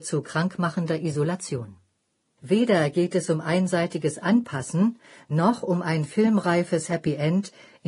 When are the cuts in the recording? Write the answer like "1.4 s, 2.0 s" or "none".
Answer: 2.4 s